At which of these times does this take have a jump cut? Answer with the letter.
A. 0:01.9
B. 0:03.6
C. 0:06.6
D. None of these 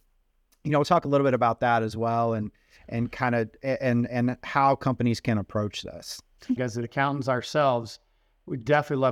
C